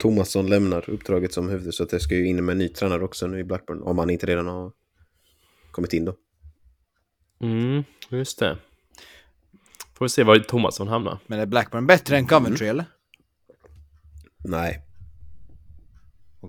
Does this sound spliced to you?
no; 0 cuts

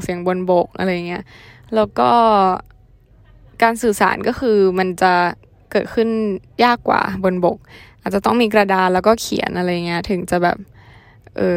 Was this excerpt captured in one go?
yes; 0 cuts

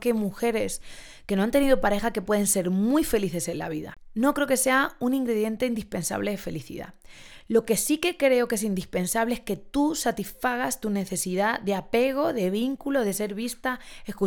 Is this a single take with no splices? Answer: yes; 0 cuts

